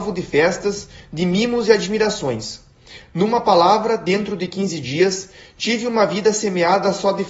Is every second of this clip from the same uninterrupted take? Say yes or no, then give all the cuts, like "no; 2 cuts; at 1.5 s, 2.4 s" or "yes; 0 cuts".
yes; 0 cuts